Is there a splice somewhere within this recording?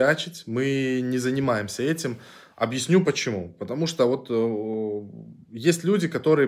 no; 0 cuts

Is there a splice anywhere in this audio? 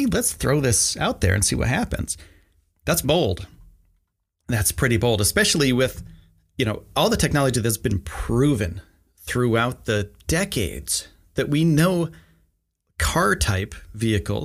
yes; 1 cut; at 3.0 s

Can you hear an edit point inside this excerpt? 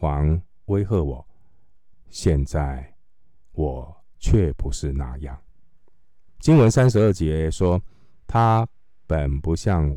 yes; 2 cuts; at 1.9 s, 6.3 s

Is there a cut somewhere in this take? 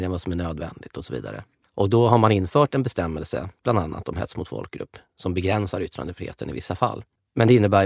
no; 0 cuts

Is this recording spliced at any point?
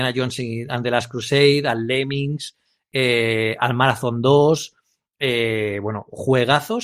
no; 0 cuts

